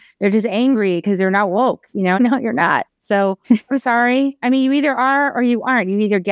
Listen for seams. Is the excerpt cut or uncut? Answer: cut